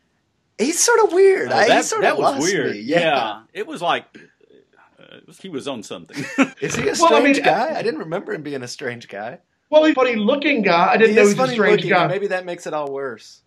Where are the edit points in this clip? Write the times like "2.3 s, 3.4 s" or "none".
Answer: 5.4 s, 6.5 s, 9.9 s

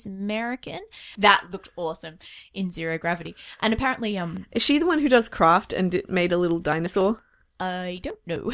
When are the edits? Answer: 1.1 s

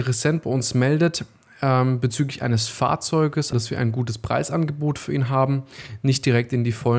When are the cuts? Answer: 3.5 s

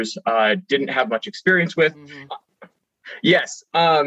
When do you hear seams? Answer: 2.3 s

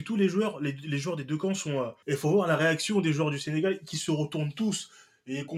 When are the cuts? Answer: 2.0 s

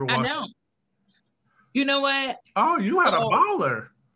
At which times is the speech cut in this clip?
2.4 s

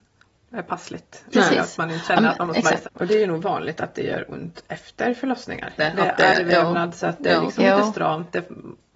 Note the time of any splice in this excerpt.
2.8 s, 5.8 s

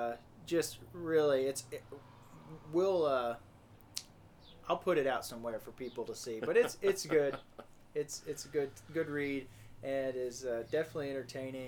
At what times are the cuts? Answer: none

